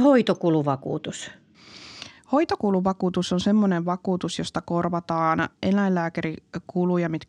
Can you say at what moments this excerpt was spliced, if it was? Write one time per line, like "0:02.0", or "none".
none